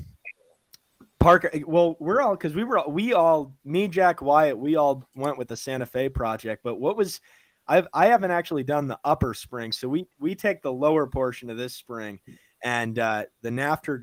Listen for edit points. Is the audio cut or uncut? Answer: uncut